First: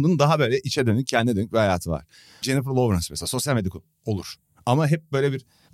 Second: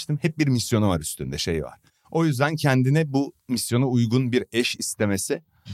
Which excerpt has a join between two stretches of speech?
first; 1 cut; at 2.4 s

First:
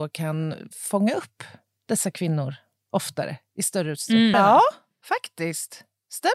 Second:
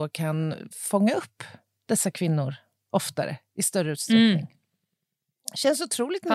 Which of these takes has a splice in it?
first; 1 cut; at 4.3 s

